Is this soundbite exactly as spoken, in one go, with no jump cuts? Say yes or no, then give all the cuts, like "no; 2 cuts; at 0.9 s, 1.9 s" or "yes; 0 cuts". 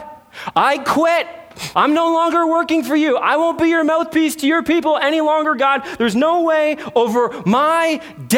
no; 1 cut; at 1.7 s